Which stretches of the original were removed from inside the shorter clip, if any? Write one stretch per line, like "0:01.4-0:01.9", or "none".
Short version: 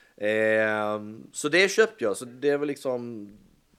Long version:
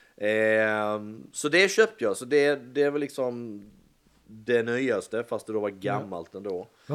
0:02.3-0:02.6